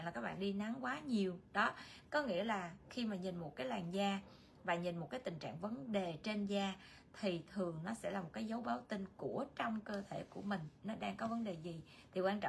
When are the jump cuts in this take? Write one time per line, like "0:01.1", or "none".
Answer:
none